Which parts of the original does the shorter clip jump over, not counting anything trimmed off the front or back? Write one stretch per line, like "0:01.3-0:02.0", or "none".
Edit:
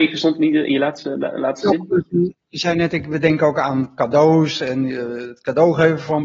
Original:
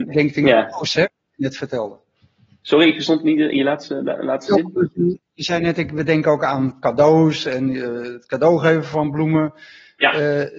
none